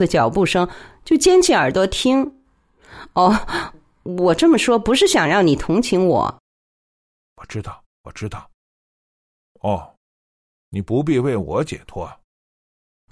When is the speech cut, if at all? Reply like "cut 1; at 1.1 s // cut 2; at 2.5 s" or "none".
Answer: cut 1; at 9.5 s